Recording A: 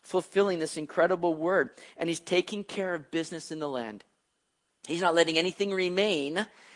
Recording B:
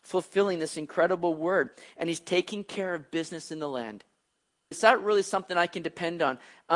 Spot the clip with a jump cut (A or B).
B